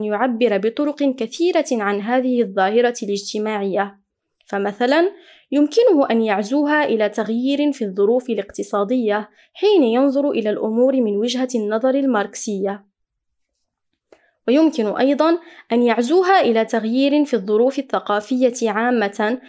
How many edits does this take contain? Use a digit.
0